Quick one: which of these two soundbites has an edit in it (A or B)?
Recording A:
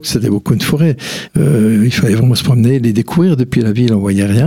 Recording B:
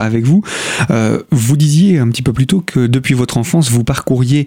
A